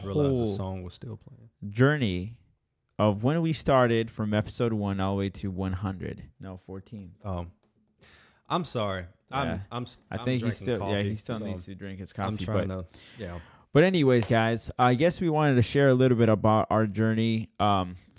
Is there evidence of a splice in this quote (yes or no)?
yes